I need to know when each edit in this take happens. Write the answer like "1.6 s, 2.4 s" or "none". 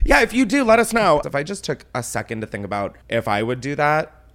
1.2 s, 3.0 s